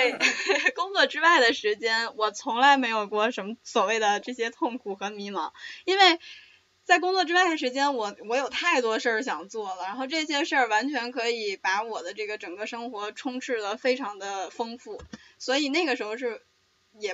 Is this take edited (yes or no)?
no